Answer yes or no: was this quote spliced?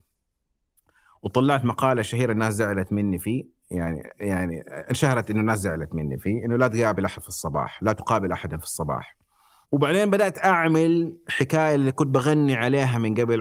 yes